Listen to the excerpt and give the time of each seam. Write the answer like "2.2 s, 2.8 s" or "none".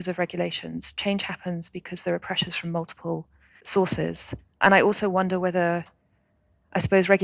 4.6 s